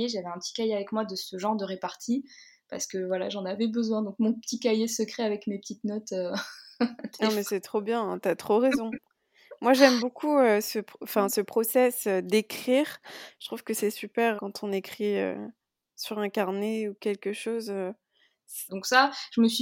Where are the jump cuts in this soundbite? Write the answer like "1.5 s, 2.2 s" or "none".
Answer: 14.4 s, 18.7 s

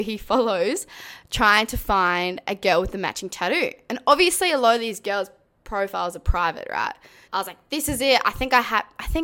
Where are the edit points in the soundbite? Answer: 7.3 s

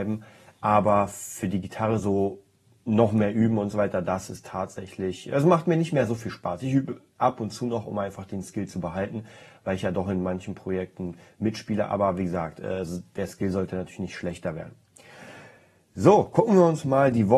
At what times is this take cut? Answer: none

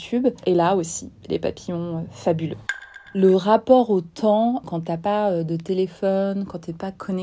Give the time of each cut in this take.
4.6 s

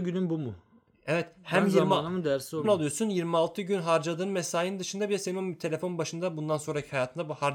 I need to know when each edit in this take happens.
2.6 s

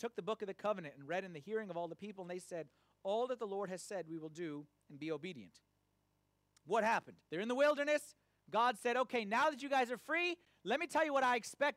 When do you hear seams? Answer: 7.2 s

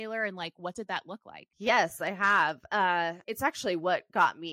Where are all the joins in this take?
1.5 s, 3.2 s

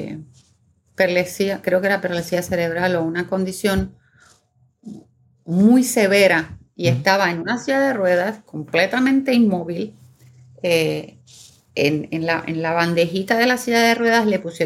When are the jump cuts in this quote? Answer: none

